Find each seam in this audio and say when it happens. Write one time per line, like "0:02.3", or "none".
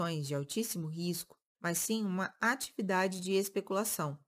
0:01.5